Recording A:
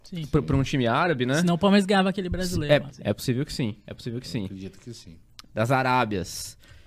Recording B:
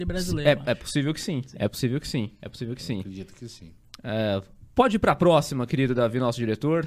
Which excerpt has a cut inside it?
A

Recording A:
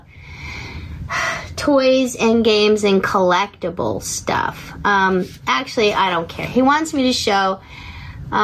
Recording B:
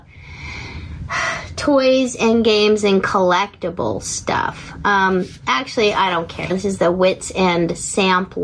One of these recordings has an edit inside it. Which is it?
B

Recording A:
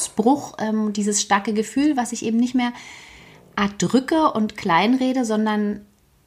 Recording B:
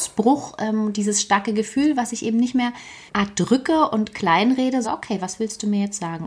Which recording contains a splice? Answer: B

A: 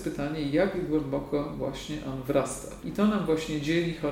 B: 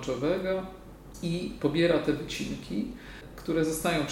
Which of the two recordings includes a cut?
A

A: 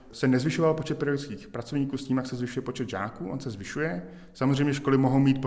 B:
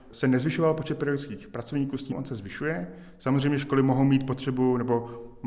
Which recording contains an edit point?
B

